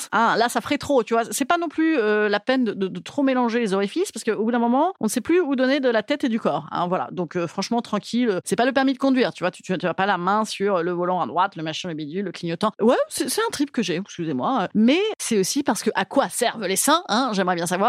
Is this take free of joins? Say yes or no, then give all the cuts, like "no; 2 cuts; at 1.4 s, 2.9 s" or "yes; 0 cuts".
no; 2 cuts; at 12.8 s, 14.0 s